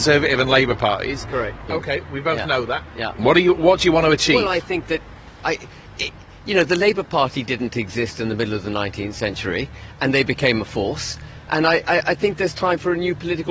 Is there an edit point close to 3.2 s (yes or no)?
yes